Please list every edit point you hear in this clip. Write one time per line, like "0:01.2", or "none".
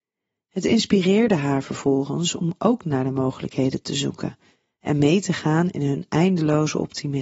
none